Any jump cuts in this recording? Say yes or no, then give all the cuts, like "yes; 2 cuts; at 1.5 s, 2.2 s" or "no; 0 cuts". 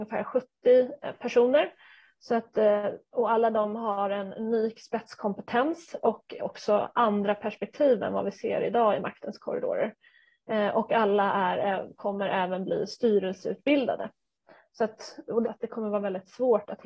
yes; 1 cut; at 15.4 s